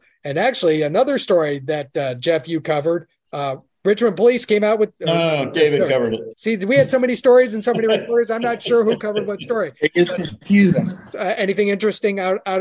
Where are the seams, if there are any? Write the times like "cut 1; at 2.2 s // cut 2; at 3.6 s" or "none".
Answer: cut 1; at 6.3 s // cut 2; at 11.1 s